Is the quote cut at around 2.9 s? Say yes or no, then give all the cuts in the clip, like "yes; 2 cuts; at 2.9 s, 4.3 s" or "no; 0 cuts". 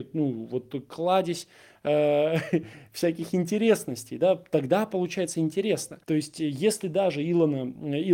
no; 1 cut; at 6.0 s